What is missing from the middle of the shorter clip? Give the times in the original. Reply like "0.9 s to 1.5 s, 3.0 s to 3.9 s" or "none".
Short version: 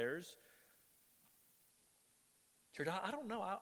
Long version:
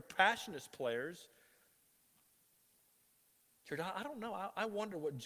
none

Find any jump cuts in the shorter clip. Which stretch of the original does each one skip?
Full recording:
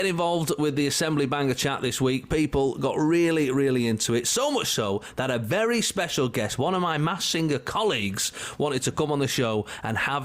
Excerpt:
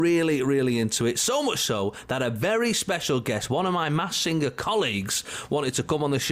none

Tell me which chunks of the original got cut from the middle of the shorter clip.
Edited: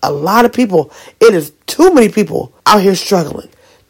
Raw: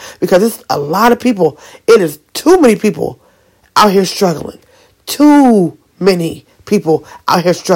3.3 s to 3.7 s

